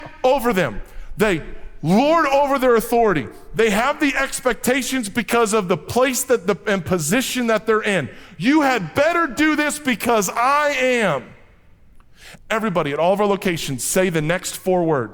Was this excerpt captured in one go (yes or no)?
no